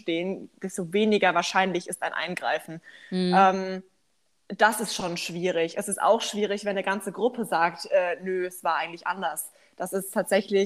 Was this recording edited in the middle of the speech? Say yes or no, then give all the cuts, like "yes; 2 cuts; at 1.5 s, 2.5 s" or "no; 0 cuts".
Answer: no; 0 cuts